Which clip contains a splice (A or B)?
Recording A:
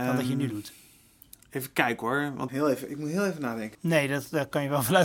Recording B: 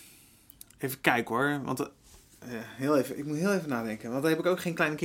A